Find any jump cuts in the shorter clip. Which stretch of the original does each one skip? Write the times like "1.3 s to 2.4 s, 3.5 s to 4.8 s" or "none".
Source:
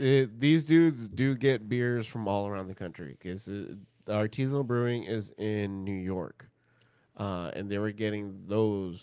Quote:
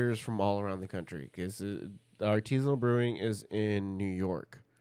none